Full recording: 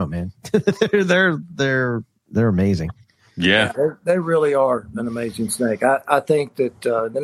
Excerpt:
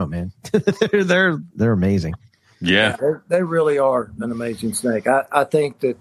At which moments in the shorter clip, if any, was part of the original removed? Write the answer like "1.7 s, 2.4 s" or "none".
1.5 s